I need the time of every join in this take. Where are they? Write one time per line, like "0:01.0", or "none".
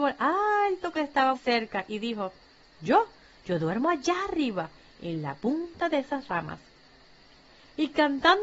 0:01.3